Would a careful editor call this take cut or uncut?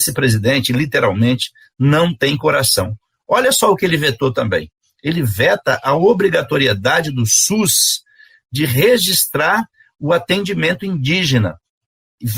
uncut